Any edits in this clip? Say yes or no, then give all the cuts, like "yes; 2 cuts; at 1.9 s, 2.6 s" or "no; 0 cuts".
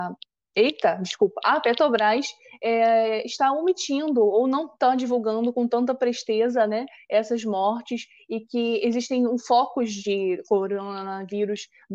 no; 0 cuts